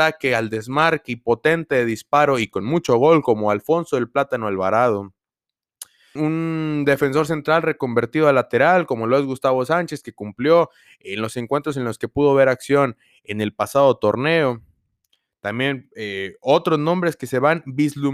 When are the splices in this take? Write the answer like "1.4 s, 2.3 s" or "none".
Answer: 6.2 s